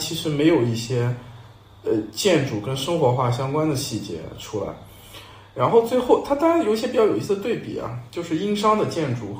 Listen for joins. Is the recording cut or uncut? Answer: uncut